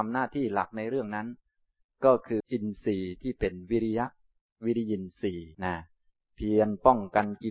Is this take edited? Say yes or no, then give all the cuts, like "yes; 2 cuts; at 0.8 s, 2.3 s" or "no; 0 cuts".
yes; 2 cuts; at 2.4 s, 5.5 s